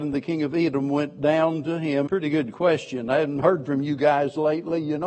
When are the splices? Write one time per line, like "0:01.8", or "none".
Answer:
0:02.1